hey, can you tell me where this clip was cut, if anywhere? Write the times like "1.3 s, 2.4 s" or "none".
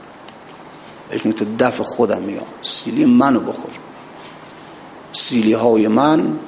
1.1 s